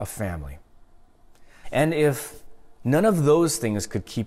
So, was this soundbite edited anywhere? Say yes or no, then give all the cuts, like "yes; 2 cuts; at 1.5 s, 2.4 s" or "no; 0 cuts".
yes; 1 cut; at 1.6 s